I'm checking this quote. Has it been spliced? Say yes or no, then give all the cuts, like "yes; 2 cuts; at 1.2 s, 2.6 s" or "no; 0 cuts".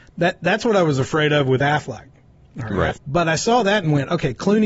yes; 1 cut; at 3.0 s